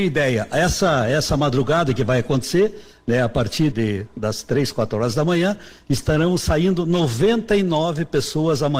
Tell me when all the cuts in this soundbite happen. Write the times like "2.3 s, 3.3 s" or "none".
3.7 s